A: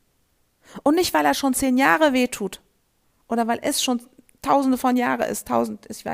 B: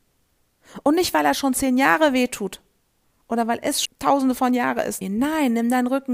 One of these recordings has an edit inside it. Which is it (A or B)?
B